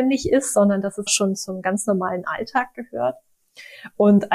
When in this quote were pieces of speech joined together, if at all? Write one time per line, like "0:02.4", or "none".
0:01.1